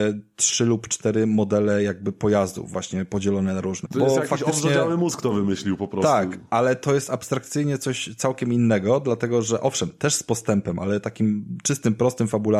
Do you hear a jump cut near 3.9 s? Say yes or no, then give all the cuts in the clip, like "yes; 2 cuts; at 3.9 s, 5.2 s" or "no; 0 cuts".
yes; 1 cut; at 3.9 s